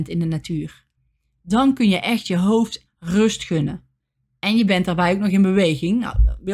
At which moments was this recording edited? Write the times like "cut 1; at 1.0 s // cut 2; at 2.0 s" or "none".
cut 1; at 2.9 s